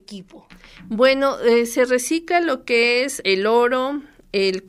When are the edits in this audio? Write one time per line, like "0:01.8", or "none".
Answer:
0:03.2

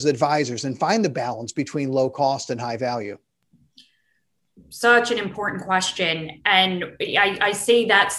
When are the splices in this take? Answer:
none

